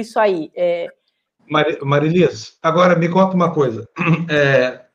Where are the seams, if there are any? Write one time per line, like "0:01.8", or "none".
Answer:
0:01.4